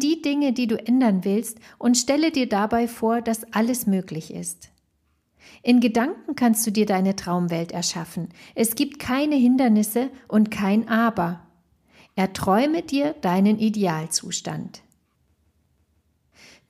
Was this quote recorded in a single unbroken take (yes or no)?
yes